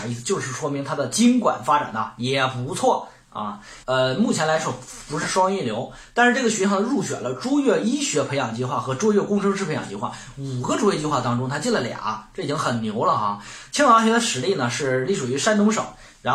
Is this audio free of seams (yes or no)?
no